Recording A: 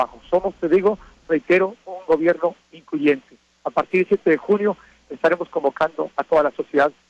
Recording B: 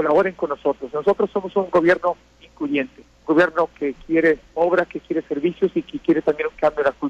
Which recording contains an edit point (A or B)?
B